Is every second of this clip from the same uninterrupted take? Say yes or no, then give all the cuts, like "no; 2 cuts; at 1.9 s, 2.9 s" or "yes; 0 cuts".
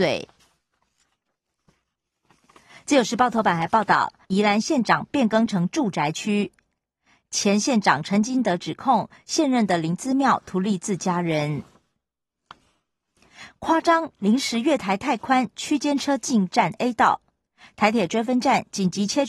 no; 1 cut; at 4.2 s